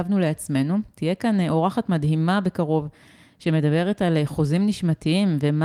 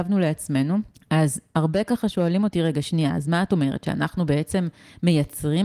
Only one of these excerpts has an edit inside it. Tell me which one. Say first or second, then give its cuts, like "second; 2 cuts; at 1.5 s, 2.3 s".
second; 1 cut; at 0.9 s